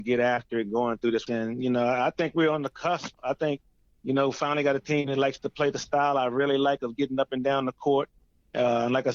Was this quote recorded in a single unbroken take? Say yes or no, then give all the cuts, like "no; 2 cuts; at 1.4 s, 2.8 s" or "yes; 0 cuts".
no; 1 cut; at 1.3 s